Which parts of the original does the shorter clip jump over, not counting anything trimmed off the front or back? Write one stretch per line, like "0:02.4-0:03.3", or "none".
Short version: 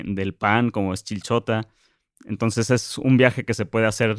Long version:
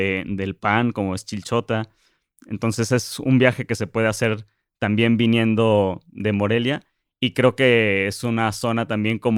none